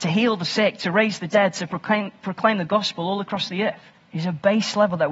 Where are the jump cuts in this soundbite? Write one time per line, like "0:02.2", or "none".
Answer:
0:04.0